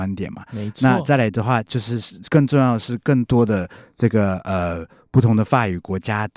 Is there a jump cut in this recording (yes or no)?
no